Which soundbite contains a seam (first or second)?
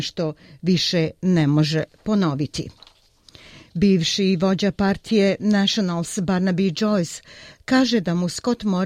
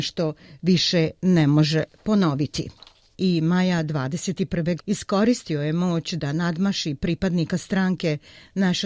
second